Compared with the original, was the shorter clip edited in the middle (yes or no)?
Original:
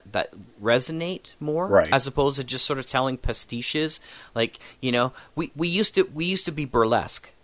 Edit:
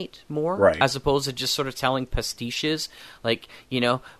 no